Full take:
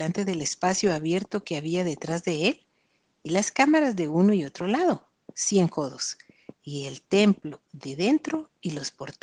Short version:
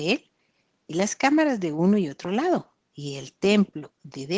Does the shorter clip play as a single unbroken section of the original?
no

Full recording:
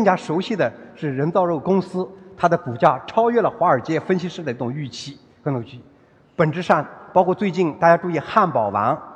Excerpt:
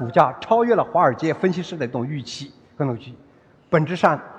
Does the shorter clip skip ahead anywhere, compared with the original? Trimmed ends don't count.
no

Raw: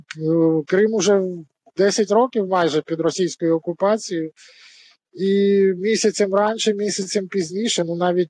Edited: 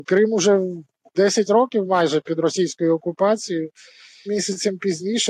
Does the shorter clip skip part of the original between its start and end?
yes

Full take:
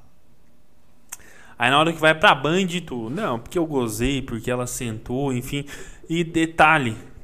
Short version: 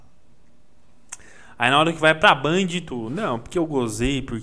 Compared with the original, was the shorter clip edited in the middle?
no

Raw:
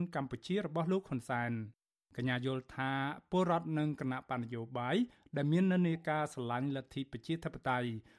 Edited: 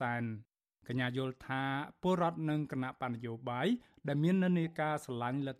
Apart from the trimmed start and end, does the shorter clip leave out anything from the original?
no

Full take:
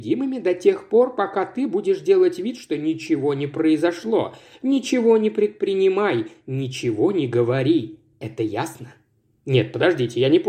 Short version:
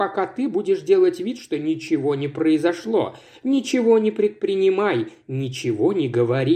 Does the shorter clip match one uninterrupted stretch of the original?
yes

